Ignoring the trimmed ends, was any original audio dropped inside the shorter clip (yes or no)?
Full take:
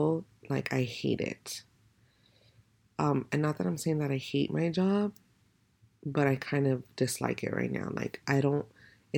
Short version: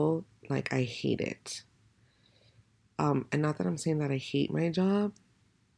no